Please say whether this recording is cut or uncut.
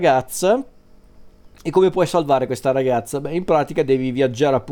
uncut